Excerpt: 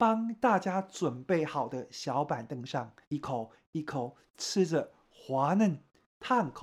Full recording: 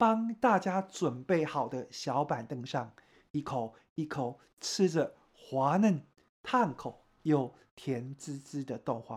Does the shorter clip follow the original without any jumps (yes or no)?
no